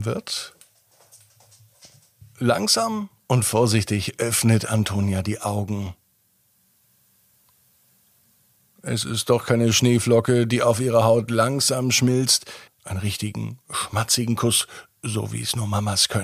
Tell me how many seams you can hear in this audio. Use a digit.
1